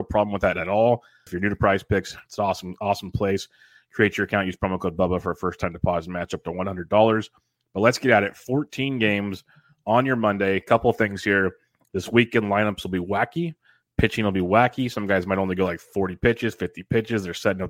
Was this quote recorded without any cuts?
no; 1 cut; at 1.3 s

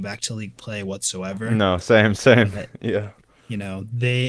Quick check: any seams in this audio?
no; 0 cuts

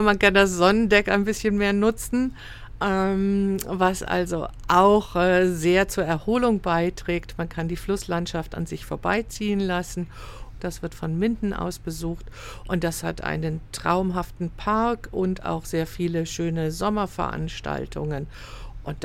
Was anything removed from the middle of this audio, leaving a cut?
yes; 1 cut; at 10.6 s

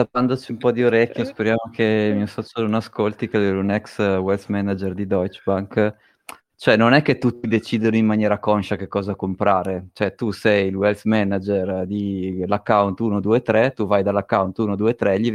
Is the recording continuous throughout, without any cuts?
yes; 0 cuts

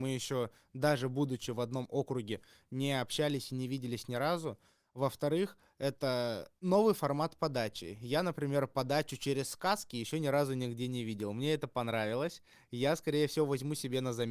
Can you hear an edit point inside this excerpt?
no; 0 cuts

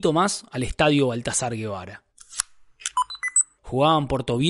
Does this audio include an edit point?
yes; 1 cut; at 3.6 s

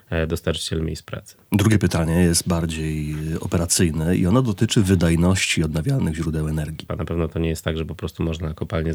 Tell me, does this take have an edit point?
yes; 1 cut; at 6.9 s

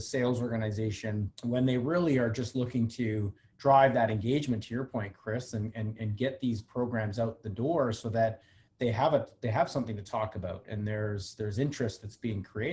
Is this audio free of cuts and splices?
no; 1 cut; at 1.3 s

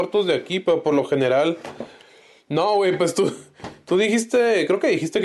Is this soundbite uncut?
yes; 0 cuts

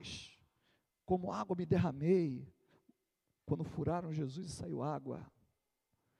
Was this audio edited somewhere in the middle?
no; 0 cuts

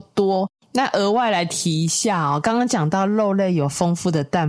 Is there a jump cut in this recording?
no; 0 cuts

